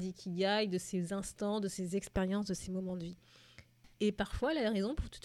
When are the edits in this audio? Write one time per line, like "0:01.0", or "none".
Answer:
0:03.9